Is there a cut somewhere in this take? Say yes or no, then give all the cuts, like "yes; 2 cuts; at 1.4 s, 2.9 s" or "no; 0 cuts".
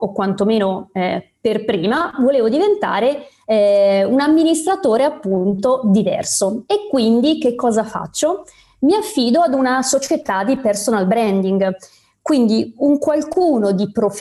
no; 0 cuts